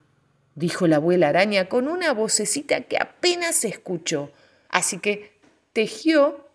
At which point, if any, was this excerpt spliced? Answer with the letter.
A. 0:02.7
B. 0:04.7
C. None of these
B